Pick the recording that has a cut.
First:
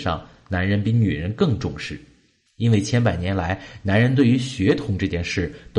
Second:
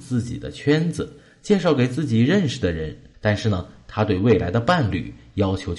second; 1 cut; at 3.1 s

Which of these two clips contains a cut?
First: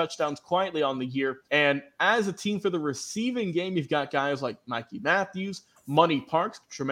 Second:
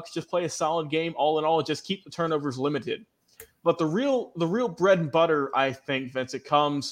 first; 1 cut; at 1.4 s

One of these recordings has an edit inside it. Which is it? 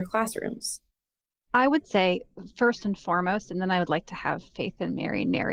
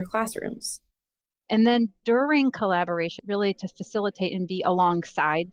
second; 2 cuts; at 1.4 s, 3.2 s

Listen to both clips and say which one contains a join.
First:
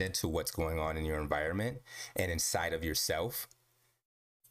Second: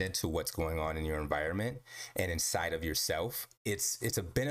second; 1 cut; at 3.5 s

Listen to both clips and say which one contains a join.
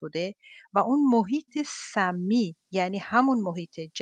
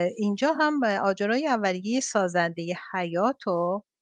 first; 1 cut; at 2.6 s

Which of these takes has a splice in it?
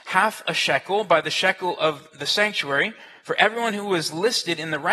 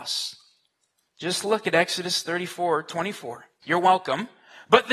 second; 1 cut; at 3.6 s

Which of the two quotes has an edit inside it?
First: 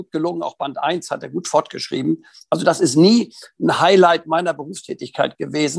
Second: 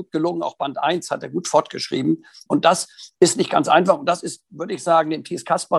second; 1 cut; at 2.5 s

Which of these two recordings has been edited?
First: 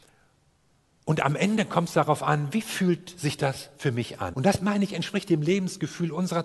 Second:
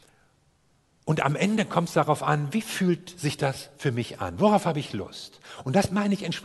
first; 1 cut; at 4.3 s

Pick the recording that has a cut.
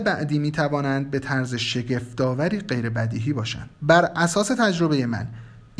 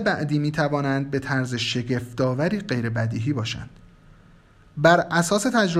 first; 1 cut; at 3.7 s

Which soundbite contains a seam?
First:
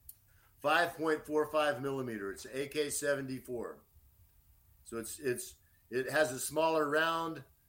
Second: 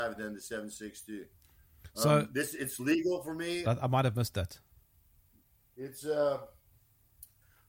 second; 1 cut; at 3.6 s

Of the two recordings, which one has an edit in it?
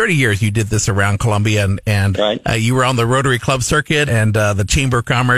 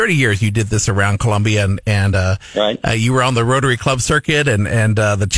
first; 2 cuts; at 2.1 s, 4.1 s

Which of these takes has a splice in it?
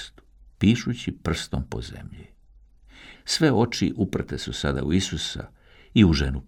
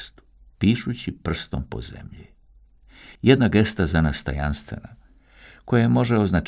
first; 1 cut; at 3.1 s

